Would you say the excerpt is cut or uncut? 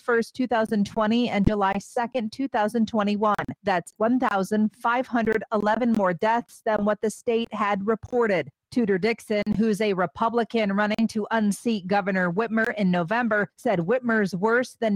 uncut